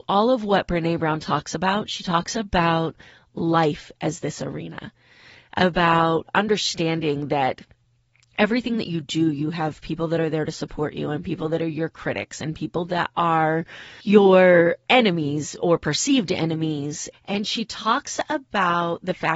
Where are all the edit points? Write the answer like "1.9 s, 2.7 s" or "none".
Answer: 17.1 s